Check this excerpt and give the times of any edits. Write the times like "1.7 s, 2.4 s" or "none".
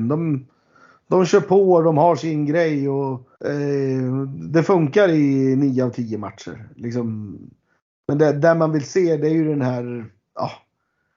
3.4 s